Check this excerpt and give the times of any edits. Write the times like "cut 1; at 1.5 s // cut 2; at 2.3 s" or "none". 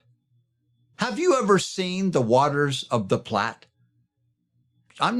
none